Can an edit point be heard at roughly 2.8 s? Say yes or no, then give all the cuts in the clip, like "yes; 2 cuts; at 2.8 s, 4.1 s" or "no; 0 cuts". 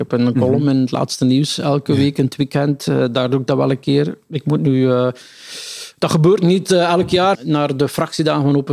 no; 1 cut; at 7.3 s